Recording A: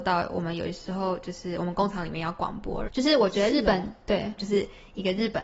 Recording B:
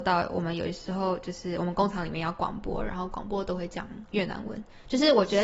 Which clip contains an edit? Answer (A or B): A